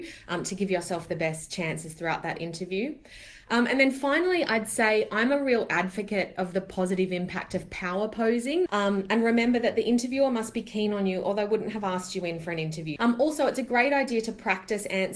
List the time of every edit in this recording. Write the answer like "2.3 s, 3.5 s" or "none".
8.7 s, 13.0 s